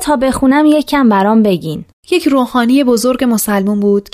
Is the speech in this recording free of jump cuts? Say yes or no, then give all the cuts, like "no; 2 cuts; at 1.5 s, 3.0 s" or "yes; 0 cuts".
yes; 0 cuts